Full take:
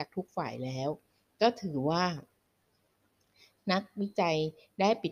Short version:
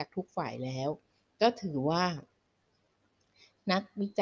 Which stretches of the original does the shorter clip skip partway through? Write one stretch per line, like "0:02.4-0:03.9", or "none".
none